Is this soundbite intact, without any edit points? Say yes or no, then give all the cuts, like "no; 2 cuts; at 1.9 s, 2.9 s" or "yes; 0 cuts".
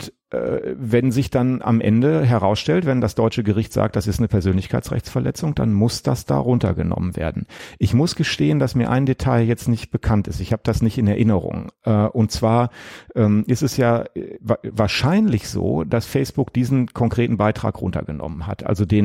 yes; 0 cuts